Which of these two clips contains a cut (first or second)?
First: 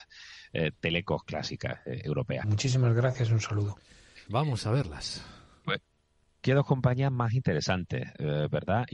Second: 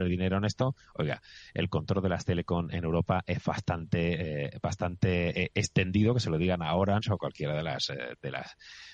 first